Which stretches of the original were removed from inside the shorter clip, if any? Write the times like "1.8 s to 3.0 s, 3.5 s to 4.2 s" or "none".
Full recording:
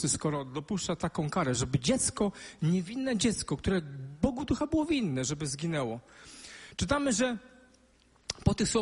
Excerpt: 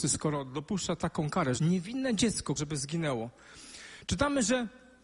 1.6 s to 2.6 s, 3.6 s to 5.3 s